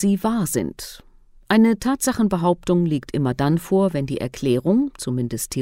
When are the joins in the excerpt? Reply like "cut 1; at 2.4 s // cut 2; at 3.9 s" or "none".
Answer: none